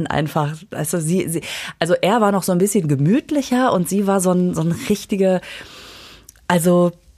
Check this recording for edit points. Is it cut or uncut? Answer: uncut